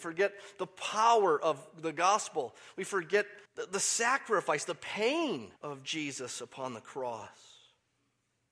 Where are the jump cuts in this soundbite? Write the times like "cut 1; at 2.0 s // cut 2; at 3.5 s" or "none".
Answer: cut 1; at 3.5 s // cut 2; at 5.6 s